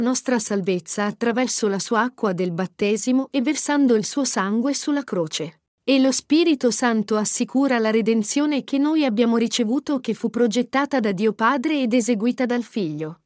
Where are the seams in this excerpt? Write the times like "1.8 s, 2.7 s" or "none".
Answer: none